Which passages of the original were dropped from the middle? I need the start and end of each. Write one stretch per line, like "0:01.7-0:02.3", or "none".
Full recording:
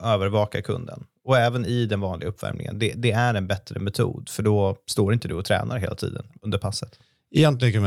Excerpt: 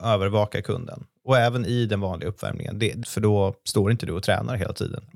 0:03.0-0:04.3

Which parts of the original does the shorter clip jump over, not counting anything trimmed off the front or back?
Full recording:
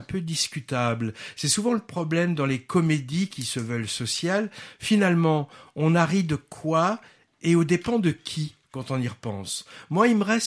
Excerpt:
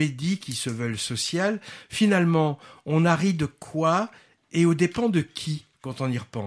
none

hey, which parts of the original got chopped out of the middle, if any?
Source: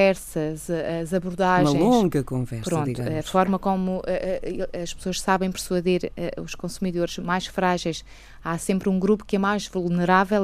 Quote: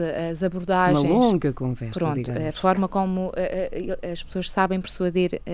none

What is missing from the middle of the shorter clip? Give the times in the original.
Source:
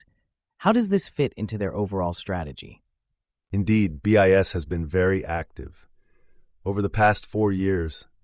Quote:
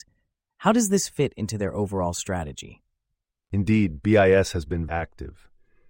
0:04.9-0:05.3

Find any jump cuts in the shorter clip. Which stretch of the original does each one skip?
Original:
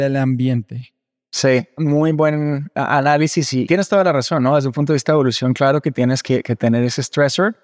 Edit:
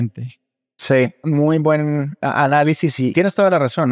none

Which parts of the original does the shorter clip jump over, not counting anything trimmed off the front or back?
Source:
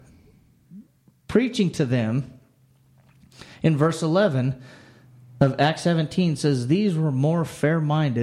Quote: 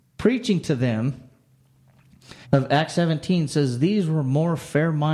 0:03.5-0:05.3

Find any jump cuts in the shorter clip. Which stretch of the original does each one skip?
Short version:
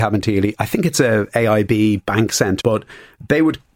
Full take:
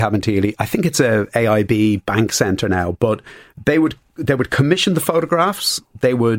0:02.6-0:03.0

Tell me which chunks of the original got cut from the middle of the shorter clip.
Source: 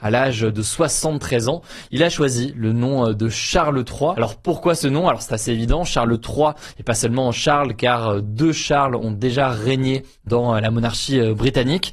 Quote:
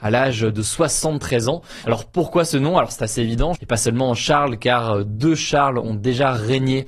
0:01.8-0:04.1
0:05.9-0:06.7

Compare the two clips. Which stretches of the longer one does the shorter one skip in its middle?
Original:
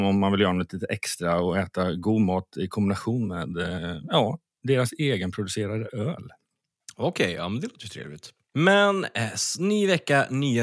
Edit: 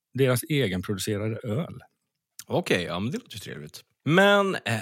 none

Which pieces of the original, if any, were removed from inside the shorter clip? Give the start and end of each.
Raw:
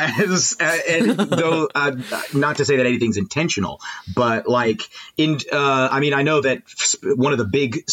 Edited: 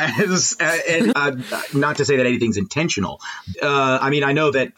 0:01.1-0:01.7
0:04.1-0:05.4

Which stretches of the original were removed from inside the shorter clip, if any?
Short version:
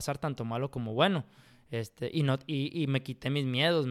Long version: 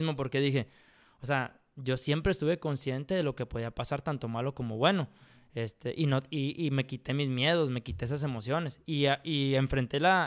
none

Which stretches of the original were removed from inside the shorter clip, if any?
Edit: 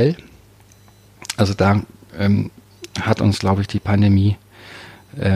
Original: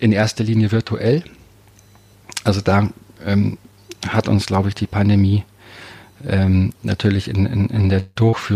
none

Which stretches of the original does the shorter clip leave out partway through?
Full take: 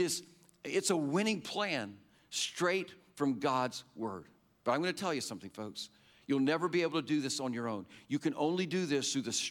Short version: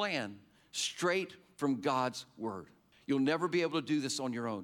0:04.5-0:06.1

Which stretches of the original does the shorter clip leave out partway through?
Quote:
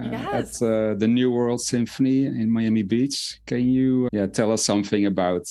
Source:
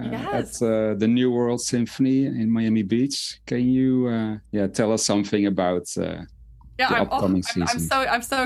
0:04.1-0:04.5

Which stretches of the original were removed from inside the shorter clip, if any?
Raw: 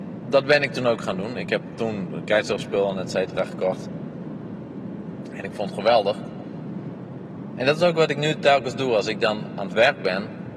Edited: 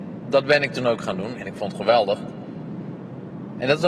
0:01.3-0:05.3

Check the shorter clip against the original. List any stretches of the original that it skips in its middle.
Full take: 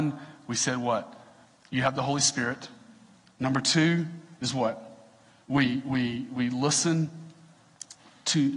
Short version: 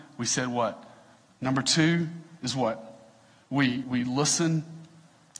0:01.6-0:03.3
0:05.8-0:06.3

